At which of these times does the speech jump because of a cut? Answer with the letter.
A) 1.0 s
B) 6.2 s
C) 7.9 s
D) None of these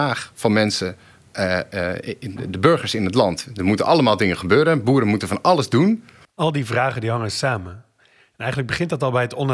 B